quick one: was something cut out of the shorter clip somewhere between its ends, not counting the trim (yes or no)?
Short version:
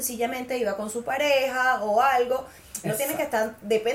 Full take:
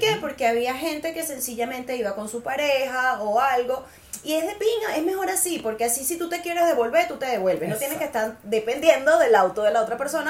yes